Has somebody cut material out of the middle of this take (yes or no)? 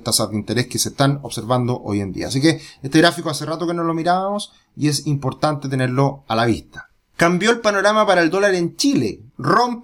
no